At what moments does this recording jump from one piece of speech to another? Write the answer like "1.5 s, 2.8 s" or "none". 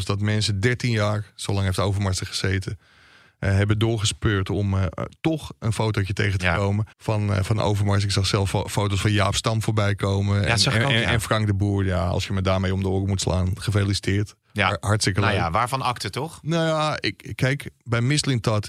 6.9 s